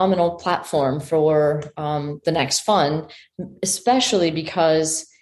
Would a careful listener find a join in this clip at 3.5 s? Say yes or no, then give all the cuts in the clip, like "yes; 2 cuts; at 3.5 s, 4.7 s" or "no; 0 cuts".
no; 0 cuts